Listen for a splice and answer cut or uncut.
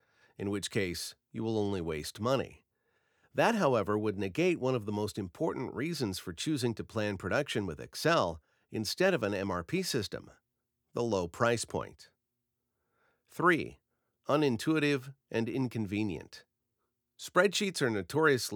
uncut